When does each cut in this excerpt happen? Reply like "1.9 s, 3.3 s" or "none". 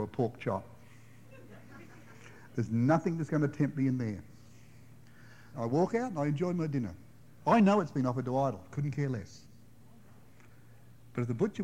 5.5 s